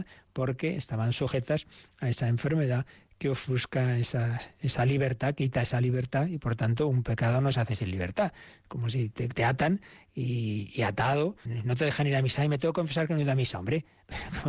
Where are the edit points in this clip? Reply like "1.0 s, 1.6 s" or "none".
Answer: 9.3 s, 11.5 s